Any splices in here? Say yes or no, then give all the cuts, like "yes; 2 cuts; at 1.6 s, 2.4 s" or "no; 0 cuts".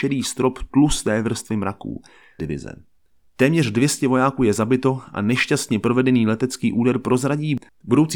yes; 1 cut; at 2.4 s